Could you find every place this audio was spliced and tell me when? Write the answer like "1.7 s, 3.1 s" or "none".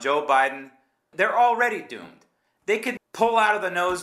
1.1 s, 3.0 s